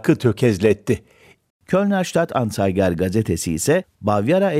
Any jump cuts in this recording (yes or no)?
yes